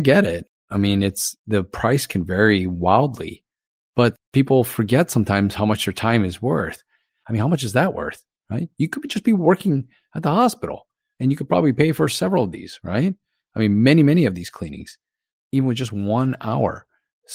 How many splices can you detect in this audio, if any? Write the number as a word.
one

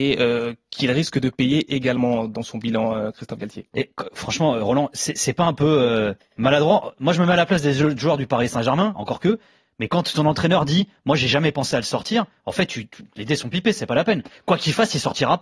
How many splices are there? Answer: one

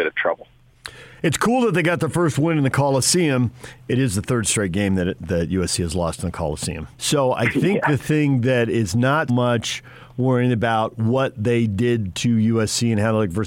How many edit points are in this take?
two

